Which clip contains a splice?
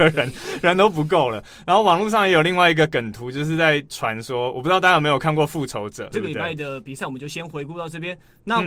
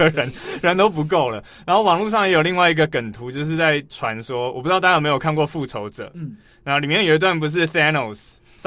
first; 1 cut; at 6.1 s

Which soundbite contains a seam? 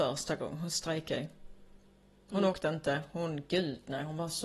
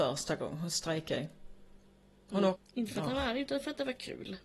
second; 1 cut; at 2.5 s

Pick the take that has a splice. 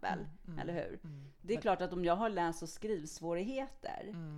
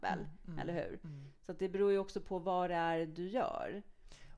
first; 1 cut; at 1.4 s

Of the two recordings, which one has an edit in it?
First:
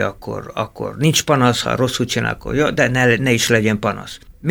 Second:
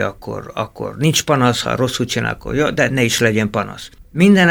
second; 1 cut; at 2.9 s

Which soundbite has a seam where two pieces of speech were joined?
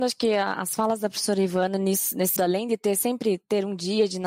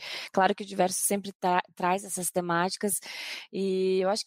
first; 1 cut; at 2.4 s

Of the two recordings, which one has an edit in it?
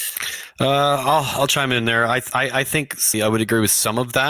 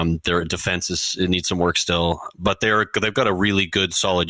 first; 1 cut; at 3.1 s

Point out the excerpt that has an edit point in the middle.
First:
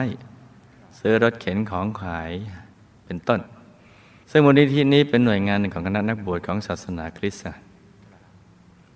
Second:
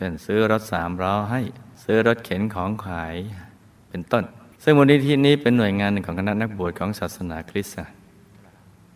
second; 2 cuts; at 1.7 s, 4.5 s

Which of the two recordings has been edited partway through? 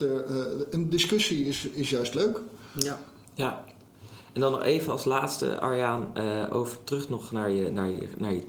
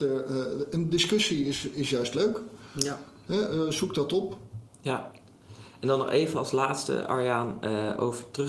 first; 1 cut; at 3.2 s

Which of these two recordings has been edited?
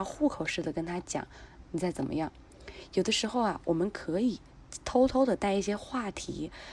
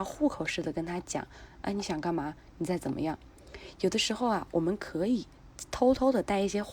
first; 1 cut; at 1.6 s

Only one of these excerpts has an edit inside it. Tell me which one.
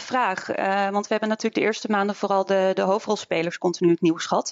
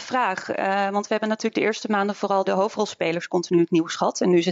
second; 1 cut; at 2.4 s

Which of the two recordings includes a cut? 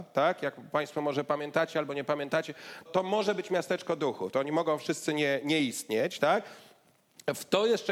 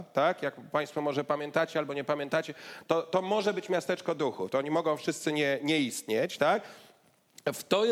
first; 1 cut; at 2.9 s

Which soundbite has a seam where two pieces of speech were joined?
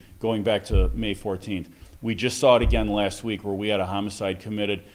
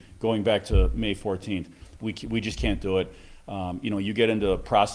second; 1 cut; at 2.0 s

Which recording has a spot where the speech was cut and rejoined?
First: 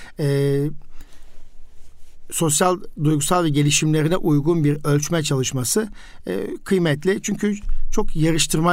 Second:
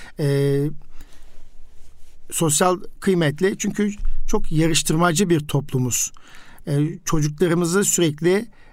second; 1 cut; at 3.0 s

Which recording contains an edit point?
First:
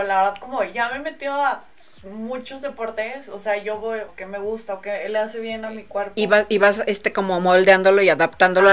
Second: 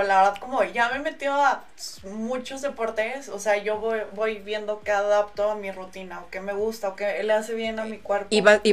first; 1 cut; at 4.1 s

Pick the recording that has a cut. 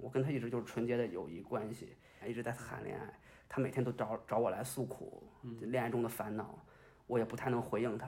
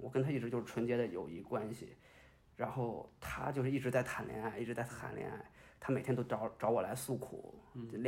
first; 1 cut; at 2.2 s

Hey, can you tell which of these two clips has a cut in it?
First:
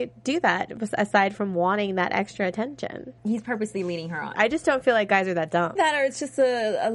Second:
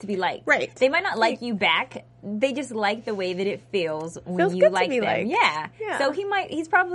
first; 3 cuts; at 3.2 s, 4.3 s, 5.8 s

